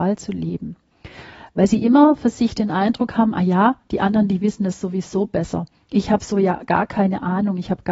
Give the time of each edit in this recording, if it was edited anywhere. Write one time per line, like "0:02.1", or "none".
none